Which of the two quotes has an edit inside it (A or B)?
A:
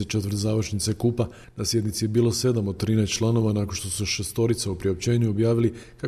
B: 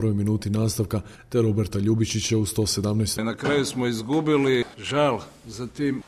B